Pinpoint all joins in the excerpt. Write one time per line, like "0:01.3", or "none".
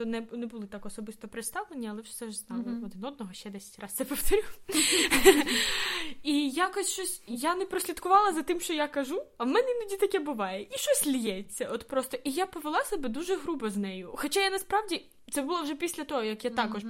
none